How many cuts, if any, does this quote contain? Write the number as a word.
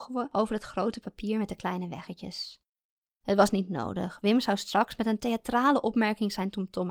one